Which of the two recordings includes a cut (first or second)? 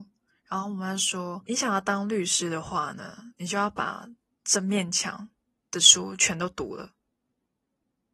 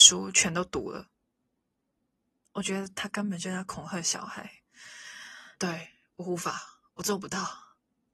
second